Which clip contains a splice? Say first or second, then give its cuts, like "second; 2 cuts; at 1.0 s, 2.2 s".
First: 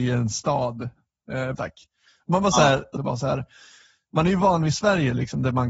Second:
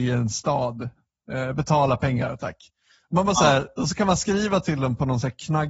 first; 2 cuts; at 1.5 s, 3.0 s